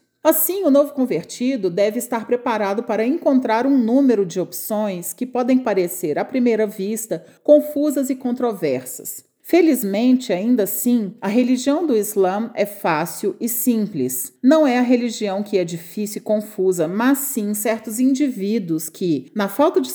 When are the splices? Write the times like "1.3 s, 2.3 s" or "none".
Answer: none